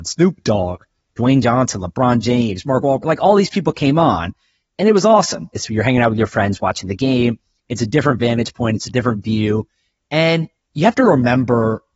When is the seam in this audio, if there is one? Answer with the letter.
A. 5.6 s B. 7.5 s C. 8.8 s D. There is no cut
A